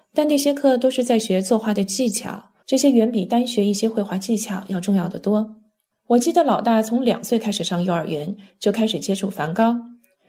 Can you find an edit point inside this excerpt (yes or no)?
yes